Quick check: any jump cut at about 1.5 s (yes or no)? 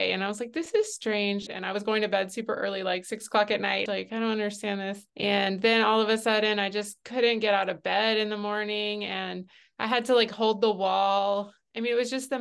yes